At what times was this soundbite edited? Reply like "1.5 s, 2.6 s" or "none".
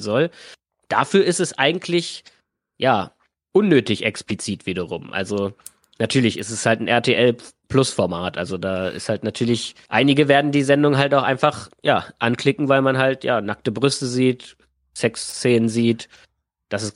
none